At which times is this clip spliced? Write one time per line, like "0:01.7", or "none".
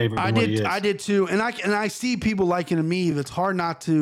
none